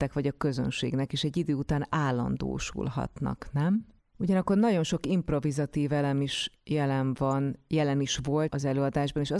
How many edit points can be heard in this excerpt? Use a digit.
2